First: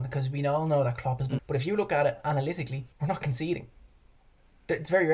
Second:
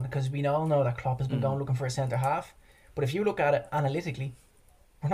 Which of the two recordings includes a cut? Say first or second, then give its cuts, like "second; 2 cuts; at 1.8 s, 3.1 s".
first; 2 cuts; at 1.4 s, 2.9 s